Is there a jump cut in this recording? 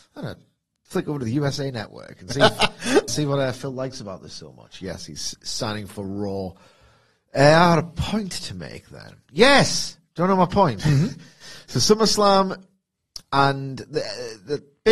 yes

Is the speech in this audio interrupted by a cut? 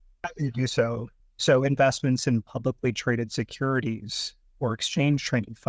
yes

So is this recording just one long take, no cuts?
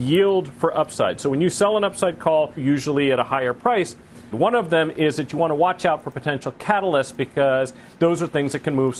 no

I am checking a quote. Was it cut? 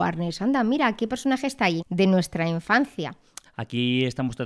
yes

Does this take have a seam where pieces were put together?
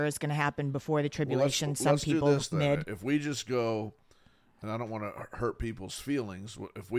no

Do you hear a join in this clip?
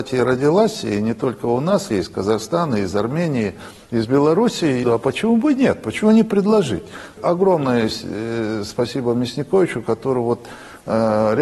yes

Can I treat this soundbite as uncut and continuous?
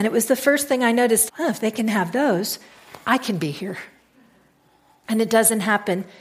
no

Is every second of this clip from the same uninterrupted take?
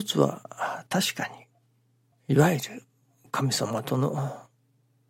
no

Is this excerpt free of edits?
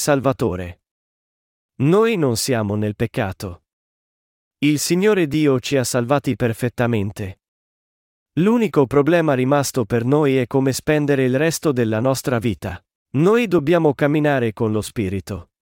no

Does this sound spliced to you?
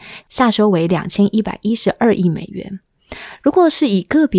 no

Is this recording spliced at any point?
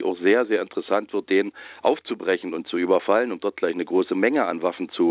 no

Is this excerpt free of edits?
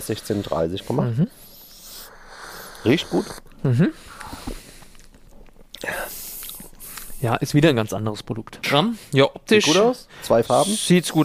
no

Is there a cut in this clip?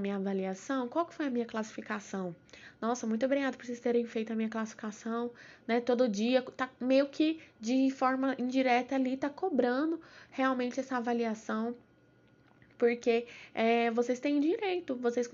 no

